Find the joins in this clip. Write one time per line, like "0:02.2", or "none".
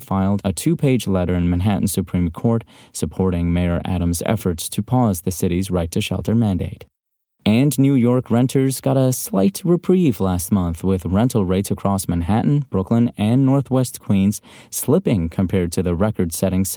none